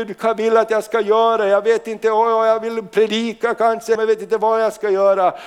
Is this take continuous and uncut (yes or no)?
no